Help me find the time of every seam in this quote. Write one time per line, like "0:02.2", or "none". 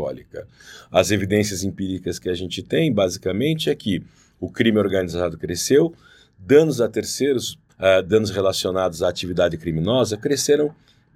0:07.7